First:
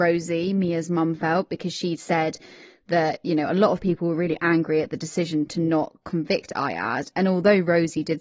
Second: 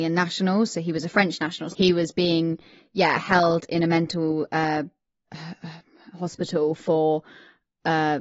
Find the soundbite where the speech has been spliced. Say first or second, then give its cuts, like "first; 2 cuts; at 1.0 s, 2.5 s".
second; 1 cut; at 1.7 s